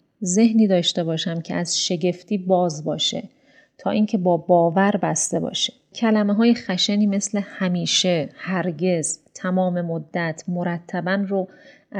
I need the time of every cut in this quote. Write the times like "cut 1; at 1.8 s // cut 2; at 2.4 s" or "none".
cut 1; at 5.9 s